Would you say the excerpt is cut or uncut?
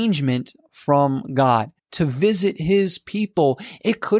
cut